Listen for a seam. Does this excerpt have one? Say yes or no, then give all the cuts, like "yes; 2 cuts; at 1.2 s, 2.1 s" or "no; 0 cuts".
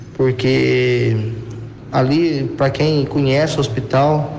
no; 0 cuts